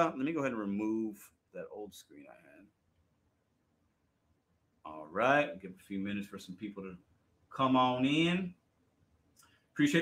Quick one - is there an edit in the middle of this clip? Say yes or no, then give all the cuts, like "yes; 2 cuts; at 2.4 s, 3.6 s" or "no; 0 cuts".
yes; 1 cut; at 1.4 s